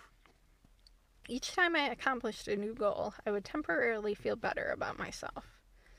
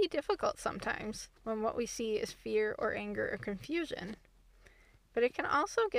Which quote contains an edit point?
second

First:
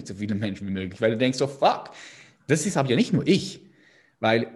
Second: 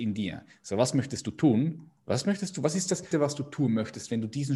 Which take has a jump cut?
second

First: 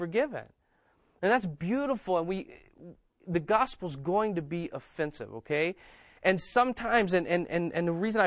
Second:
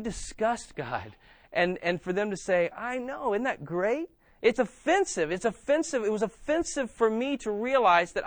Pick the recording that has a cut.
second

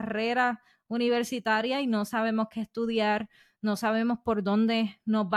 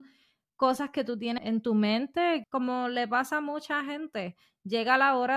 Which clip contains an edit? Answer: second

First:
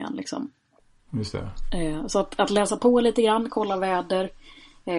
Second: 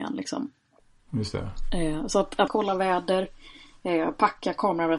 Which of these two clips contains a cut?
second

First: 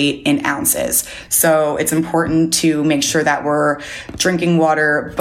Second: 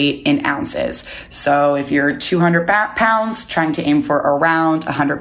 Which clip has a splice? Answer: first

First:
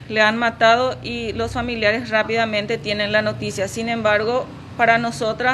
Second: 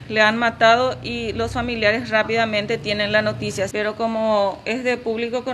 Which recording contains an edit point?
second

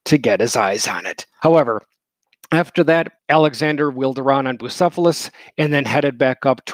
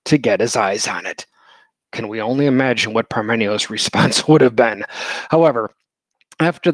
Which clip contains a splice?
first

